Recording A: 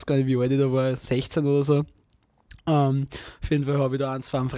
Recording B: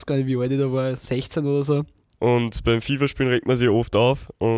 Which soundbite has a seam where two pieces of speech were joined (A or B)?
B